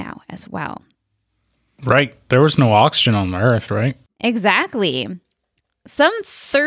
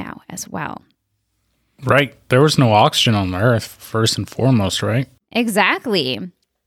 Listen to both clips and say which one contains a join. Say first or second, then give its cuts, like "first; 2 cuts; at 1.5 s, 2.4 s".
first; 1 cut; at 3.7 s